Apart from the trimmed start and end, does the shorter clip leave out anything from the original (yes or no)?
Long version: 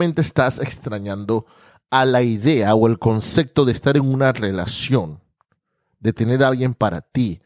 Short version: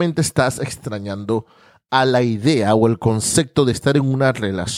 no